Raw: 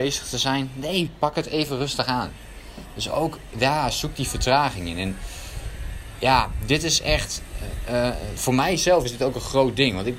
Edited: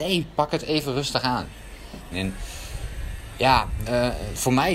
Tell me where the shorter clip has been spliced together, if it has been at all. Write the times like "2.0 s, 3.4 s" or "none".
2.1 s, 3.8 s